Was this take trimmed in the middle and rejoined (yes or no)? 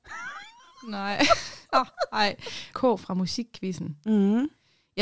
yes